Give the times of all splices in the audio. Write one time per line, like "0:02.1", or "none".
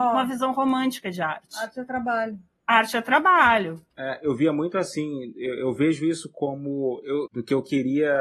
0:03.9
0:07.3